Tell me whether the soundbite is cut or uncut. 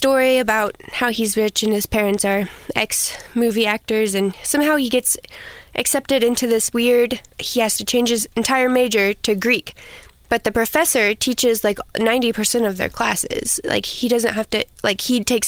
uncut